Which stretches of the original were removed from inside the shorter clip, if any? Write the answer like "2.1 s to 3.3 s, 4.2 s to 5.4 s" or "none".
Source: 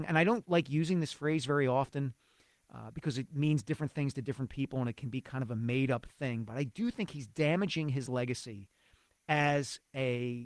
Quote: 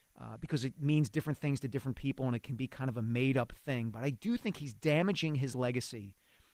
none

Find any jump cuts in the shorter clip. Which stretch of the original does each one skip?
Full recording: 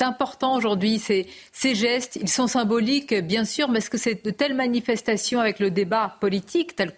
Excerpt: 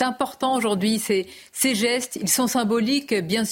none

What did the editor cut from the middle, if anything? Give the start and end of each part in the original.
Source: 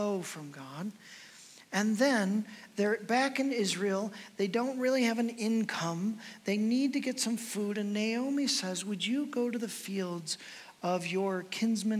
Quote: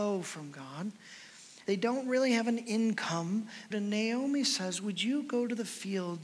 1.6 s to 4.4 s, 6.4 s to 7.7 s

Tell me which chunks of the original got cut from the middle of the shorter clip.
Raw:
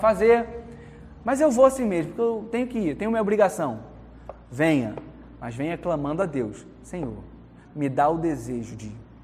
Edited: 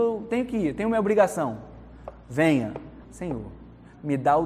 5.3 s to 6.8 s

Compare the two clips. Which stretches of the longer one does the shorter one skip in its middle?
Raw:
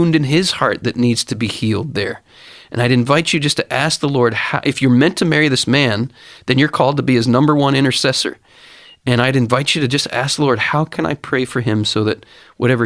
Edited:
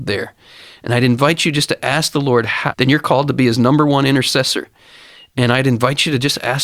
4.6 s to 6.4 s

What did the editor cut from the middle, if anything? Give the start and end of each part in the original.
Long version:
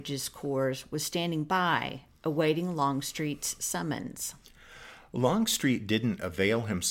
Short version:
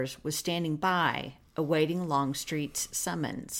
none

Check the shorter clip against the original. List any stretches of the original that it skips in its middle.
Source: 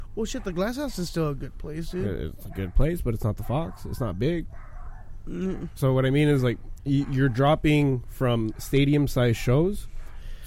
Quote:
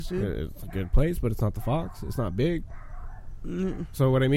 none

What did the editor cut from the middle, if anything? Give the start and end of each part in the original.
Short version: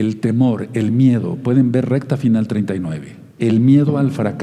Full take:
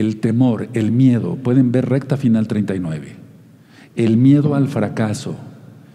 3.3 s to 3.9 s

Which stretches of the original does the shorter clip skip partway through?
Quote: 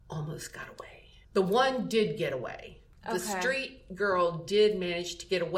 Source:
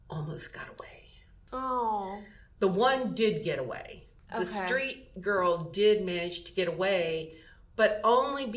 1.2 s to 2.5 s

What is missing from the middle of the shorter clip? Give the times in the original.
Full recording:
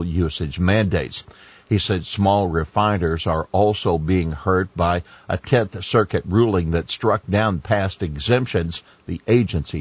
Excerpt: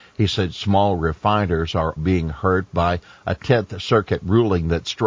3.5 s to 4.0 s

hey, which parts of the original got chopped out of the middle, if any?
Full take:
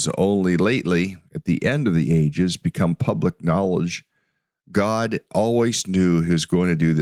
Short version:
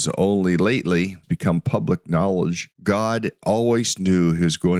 1.2 s to 2.6 s, 4.1 s to 4.6 s

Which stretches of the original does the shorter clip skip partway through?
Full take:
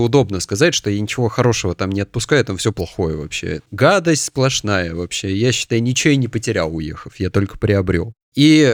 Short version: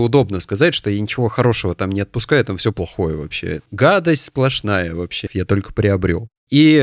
5.3 s to 7.1 s

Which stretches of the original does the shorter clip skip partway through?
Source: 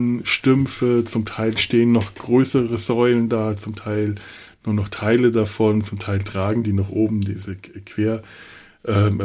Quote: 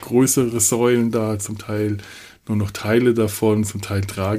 none

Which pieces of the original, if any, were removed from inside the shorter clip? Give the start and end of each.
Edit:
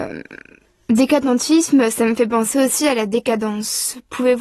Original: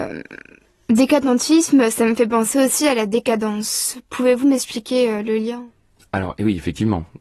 none

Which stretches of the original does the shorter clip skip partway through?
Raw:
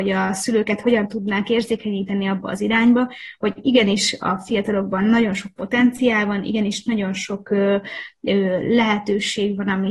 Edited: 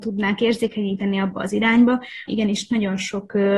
3.4 s to 6.4 s

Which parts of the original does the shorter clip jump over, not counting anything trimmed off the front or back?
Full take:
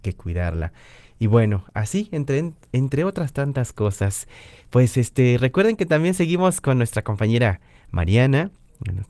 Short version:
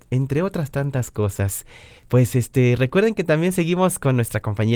none

